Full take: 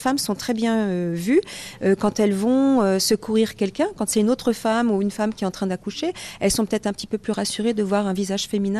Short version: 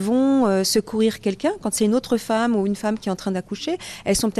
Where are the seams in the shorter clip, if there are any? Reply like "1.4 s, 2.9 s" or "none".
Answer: none